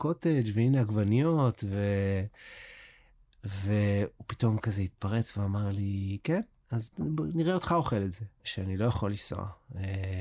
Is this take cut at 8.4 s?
yes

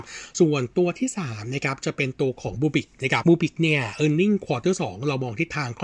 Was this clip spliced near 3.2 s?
yes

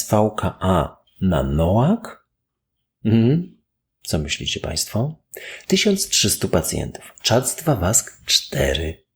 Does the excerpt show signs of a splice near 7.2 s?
yes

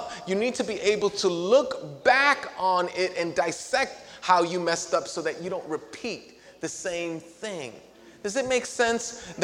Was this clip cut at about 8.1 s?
no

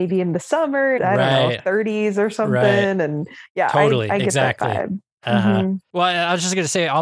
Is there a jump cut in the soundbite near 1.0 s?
yes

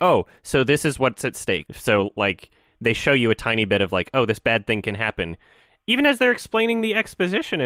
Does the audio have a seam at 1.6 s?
yes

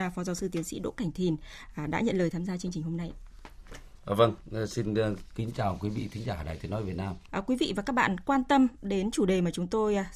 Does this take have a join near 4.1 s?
no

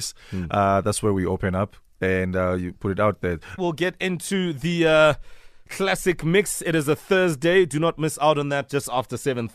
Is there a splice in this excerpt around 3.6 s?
yes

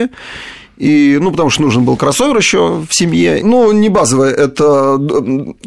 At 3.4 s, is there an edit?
yes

